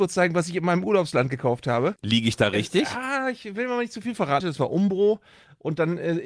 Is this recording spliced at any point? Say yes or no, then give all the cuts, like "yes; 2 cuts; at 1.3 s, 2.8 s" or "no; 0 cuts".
yes; 2 cuts; at 2.0 s, 4.4 s